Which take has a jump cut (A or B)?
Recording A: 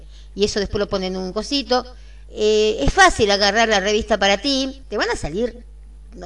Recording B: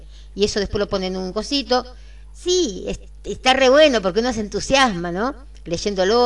A